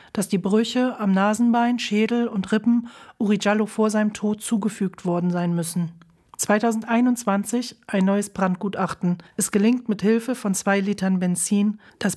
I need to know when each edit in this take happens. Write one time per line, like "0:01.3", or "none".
none